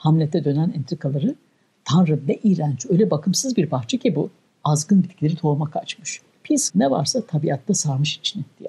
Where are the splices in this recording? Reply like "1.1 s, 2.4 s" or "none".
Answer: 6.7 s